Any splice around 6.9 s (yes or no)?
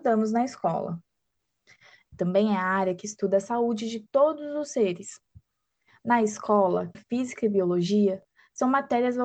yes